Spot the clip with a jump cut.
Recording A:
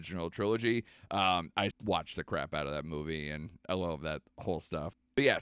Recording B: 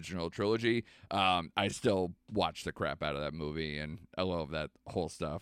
A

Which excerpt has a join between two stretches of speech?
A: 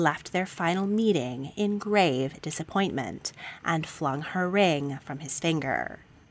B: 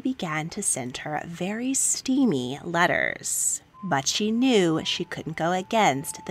B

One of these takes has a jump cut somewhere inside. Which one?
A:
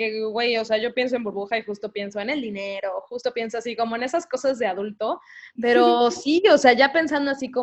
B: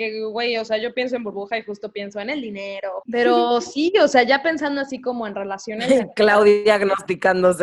B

